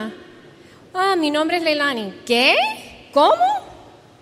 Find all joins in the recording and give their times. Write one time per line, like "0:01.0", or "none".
none